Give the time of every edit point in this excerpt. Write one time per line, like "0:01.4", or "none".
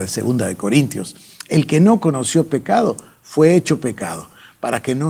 none